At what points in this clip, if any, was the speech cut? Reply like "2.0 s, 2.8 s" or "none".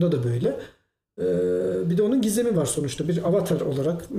none